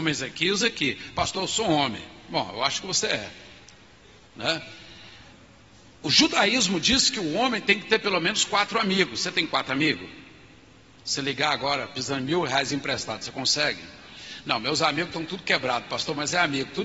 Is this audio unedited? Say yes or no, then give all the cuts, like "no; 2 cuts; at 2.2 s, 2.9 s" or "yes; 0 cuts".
yes; 0 cuts